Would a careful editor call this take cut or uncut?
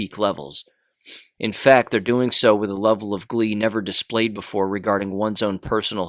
cut